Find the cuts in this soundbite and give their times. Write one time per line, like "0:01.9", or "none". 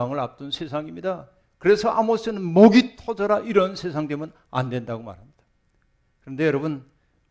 none